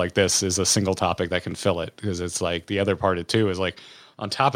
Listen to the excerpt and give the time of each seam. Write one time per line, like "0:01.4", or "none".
none